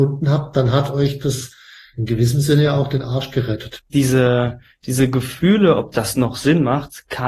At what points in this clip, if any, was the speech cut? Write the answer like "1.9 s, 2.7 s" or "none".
none